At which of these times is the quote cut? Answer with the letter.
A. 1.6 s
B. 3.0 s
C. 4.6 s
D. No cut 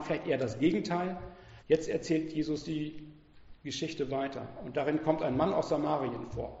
A